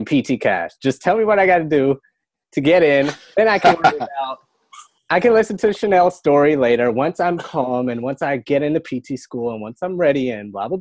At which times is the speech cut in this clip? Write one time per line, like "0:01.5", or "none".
none